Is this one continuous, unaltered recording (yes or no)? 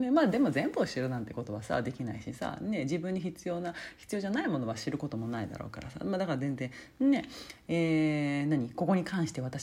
yes